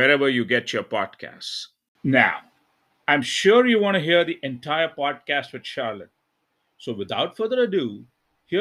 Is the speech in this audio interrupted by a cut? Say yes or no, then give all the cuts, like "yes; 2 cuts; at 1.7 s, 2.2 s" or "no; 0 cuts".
no; 0 cuts